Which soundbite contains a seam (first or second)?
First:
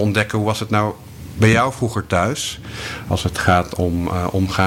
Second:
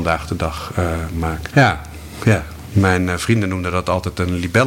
second